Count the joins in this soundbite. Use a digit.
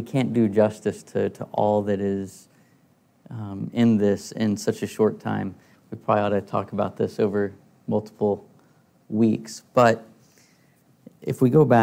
0